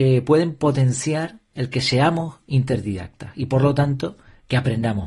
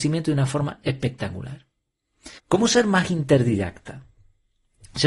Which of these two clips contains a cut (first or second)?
second